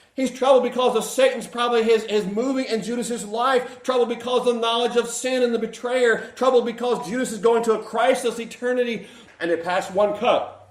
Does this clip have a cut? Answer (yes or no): yes